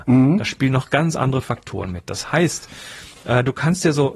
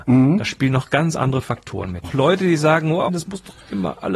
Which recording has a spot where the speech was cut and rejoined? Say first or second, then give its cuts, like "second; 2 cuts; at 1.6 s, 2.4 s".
second; 2 cuts; at 2.0 s, 3.1 s